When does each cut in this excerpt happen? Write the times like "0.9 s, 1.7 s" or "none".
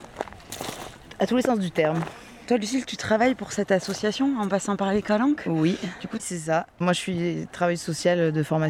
6.2 s